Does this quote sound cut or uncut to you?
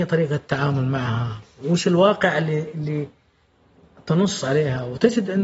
uncut